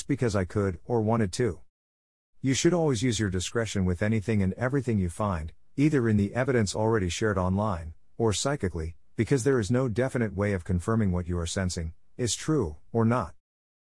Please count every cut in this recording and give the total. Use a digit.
0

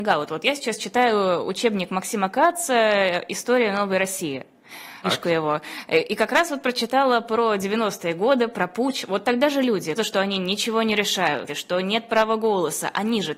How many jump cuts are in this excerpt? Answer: 3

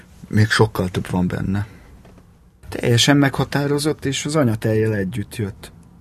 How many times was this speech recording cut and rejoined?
1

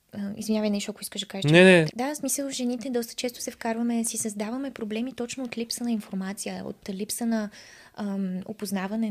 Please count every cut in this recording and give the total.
1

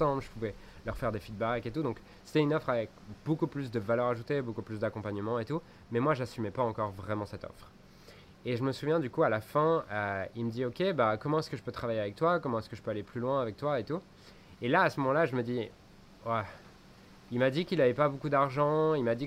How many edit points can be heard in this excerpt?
0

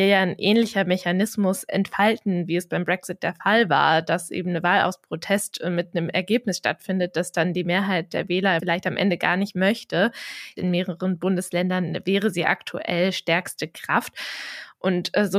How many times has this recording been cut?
1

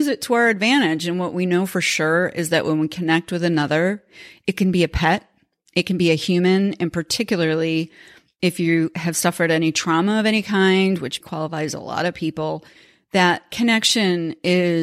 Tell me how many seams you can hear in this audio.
1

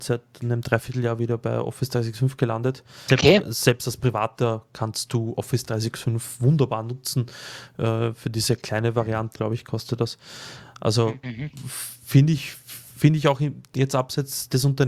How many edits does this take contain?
2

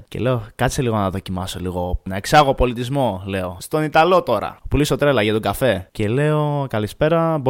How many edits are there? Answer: 0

